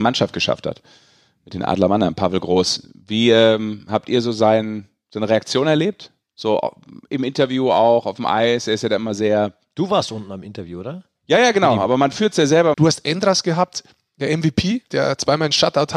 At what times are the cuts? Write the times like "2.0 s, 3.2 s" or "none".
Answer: 12.7 s, 14.9 s